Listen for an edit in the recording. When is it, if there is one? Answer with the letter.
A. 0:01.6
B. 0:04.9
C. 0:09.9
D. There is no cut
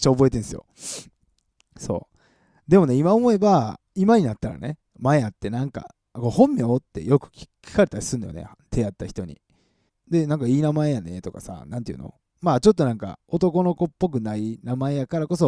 C